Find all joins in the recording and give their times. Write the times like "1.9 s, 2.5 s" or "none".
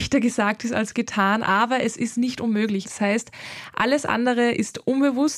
2.8 s